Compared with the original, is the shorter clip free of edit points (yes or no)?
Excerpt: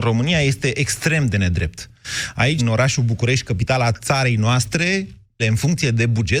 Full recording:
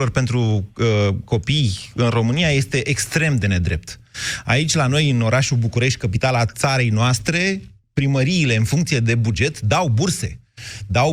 no